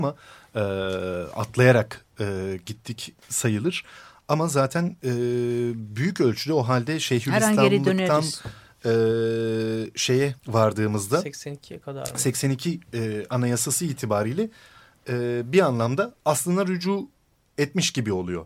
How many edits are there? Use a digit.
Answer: 2